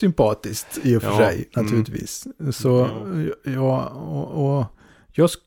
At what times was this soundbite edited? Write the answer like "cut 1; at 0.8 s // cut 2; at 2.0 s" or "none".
none